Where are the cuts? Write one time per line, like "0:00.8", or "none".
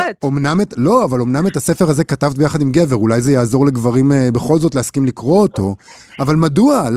none